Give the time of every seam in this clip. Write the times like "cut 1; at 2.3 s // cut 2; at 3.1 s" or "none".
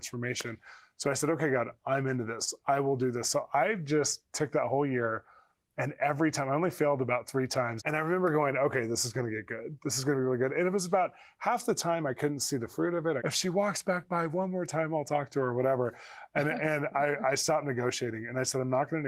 cut 1; at 7.8 s // cut 2; at 13.2 s